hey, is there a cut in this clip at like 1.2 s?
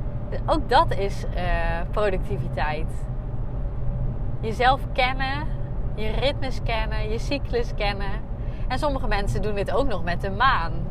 no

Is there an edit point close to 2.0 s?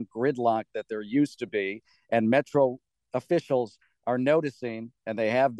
no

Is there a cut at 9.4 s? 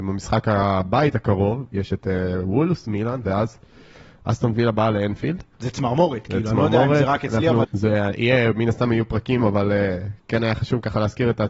yes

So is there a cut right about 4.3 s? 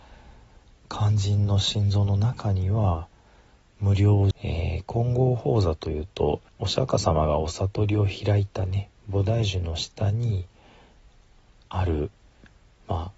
yes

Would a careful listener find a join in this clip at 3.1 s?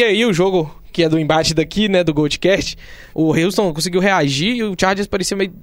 yes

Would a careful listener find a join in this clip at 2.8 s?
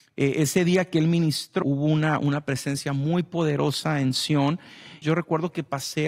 no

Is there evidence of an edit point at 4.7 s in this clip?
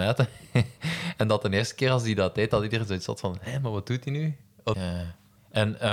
yes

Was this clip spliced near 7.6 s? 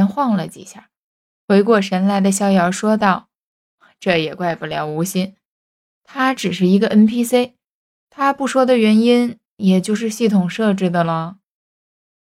no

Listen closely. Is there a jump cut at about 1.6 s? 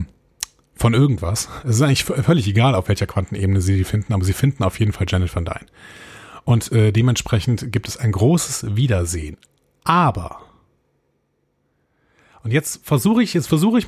no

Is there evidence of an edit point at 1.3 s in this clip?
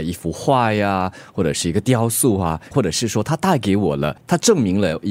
no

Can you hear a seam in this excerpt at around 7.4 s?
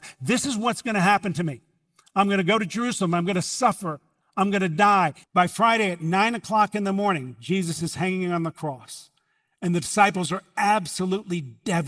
no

